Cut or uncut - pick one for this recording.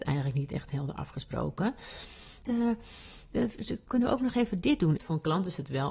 cut